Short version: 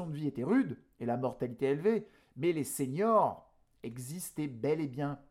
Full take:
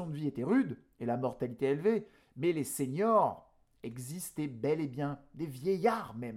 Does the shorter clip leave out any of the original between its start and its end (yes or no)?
no